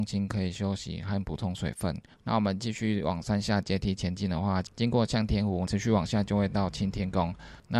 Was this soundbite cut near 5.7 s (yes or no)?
yes